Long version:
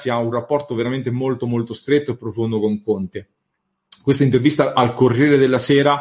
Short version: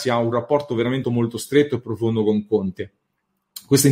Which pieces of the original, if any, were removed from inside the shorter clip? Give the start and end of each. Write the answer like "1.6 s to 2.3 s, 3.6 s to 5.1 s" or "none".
1.0 s to 1.4 s